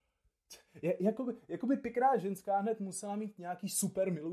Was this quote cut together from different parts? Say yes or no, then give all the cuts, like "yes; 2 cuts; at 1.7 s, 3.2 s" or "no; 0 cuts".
no; 0 cuts